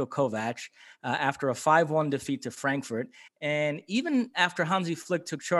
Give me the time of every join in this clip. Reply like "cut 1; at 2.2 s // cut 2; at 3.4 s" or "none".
cut 1; at 3.3 s